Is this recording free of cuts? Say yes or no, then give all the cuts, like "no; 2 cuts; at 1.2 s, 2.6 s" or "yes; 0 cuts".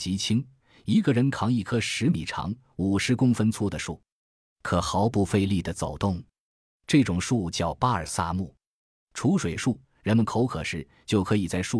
no; 1 cut; at 9.8 s